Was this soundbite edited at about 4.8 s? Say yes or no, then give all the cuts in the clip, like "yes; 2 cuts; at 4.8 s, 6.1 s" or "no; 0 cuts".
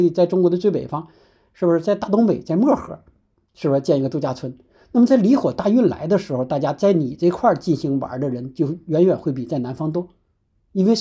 no; 0 cuts